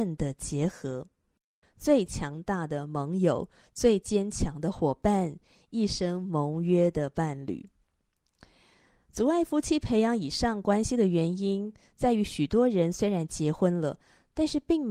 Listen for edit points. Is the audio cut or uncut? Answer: cut